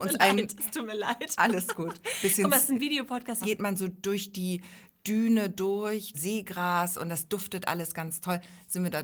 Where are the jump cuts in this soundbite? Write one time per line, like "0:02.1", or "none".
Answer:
0:03.4
0:06.1